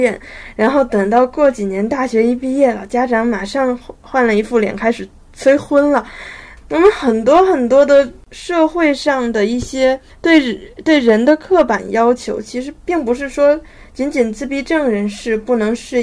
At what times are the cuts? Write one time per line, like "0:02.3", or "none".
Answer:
0:06.6